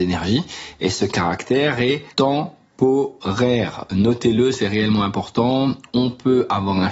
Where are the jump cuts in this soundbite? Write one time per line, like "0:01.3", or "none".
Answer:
0:02.1